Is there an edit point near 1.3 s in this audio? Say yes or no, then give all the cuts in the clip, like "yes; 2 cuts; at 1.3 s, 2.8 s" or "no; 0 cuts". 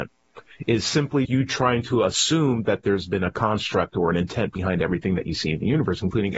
yes; 1 cut; at 1.3 s